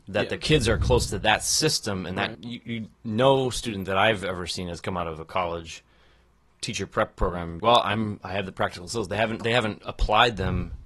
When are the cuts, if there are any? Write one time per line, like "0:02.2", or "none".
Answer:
0:02.3
0:07.6